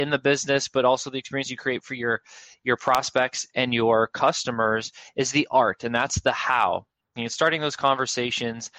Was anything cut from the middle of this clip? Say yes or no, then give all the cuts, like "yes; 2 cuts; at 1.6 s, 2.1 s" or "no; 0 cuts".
yes; 1 cut; at 7.2 s